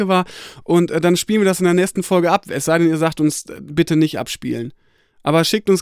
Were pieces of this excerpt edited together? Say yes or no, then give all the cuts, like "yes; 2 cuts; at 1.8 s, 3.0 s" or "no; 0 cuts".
no; 0 cuts